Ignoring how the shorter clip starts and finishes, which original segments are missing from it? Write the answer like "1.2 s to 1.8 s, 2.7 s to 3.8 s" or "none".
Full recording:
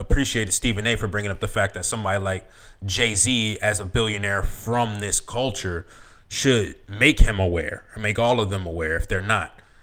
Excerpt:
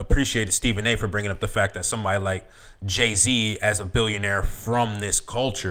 none